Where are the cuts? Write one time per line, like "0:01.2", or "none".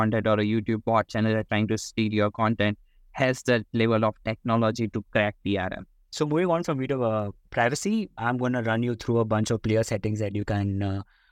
none

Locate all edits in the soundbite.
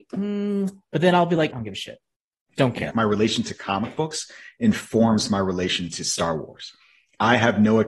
0:01.5
0:02.9

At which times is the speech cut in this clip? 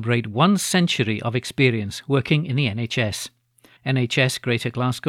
0:03.8

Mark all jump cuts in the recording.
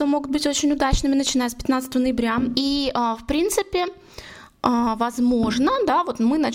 0:02.5

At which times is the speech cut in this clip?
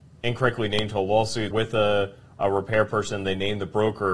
0:01.5

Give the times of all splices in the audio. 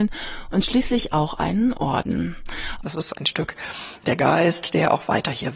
0:02.8

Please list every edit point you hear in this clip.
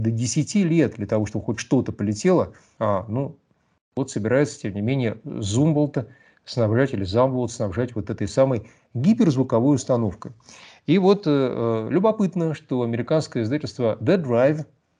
0:02.8

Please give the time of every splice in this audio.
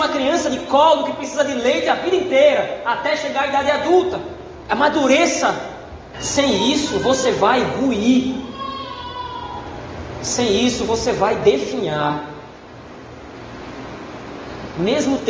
0:06.1

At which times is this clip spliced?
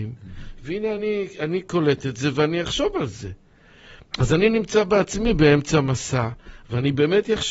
none

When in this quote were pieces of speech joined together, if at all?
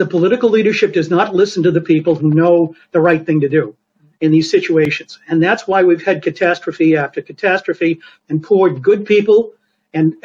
none

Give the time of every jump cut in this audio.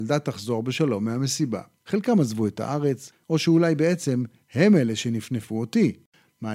0:01.8
0:03.2

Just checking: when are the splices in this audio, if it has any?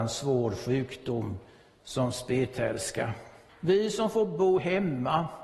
0:03.5

